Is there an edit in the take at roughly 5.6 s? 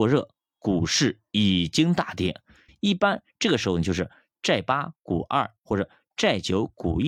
no; 1 cut; at 2.7 s

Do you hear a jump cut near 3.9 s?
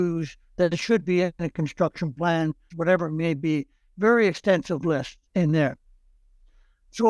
no; 2 cuts; at 2.7 s, 5.3 s

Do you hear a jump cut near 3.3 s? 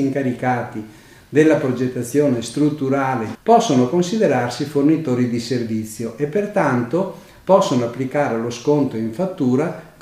yes; 1 cut; at 3.3 s

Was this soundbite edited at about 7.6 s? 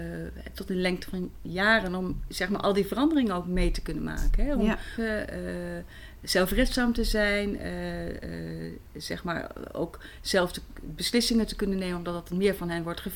no; 1 cut; at 5.0 s

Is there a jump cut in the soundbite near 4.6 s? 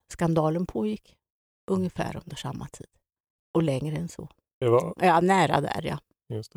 yes; 1 cut; at 4.6 s

